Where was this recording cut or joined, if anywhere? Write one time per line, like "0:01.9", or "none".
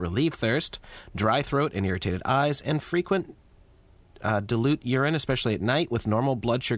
none